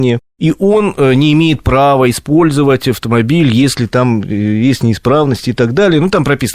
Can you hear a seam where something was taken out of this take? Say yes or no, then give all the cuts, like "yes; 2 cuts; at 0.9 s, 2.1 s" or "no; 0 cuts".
no; 0 cuts